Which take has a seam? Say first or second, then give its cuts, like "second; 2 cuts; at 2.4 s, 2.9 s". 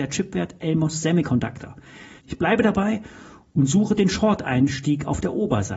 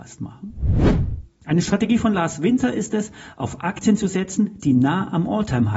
first; 1 cut; at 2.2 s